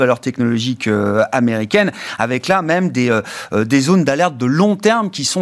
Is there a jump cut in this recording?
no; 0 cuts

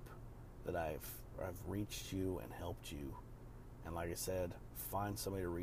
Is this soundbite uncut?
yes; 0 cuts

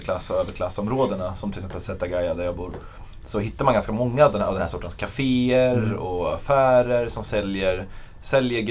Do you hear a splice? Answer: no; 0 cuts

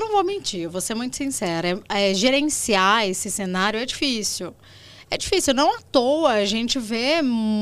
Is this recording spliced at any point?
no; 0 cuts

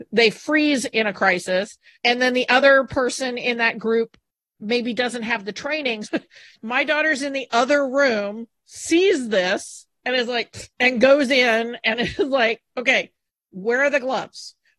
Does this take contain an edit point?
yes; 1 cut; at 6.0 s

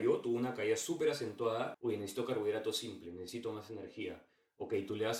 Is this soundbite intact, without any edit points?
no; 1 cut; at 1.7 s

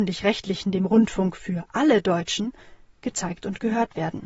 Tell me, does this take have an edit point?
no; 0 cuts

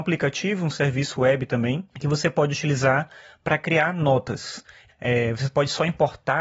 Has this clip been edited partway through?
yes; 1 cut; at 4.9 s

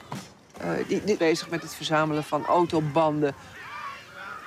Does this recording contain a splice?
yes; 1 cut; at 1.2 s

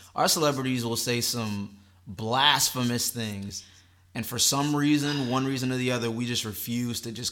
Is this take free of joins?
yes; 0 cuts

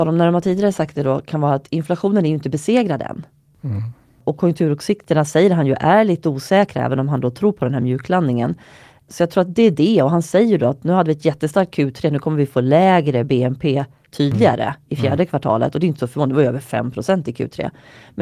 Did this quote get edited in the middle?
no; 0 cuts

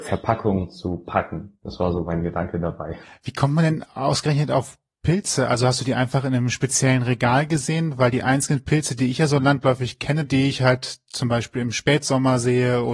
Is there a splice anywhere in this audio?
yes; 1 cut; at 10.2 s

